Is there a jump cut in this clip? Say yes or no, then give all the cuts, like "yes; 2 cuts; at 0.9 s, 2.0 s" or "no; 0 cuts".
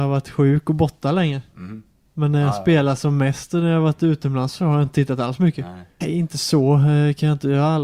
yes; 1 cut; at 6.0 s